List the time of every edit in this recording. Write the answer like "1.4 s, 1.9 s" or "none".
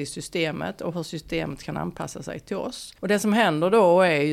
3.0 s